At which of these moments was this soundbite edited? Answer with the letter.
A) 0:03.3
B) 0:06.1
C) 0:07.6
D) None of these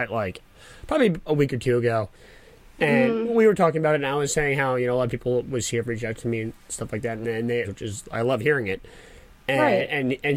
C